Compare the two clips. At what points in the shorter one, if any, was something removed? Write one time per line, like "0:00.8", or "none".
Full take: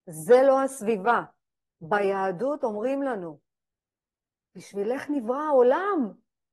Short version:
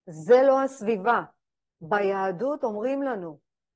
none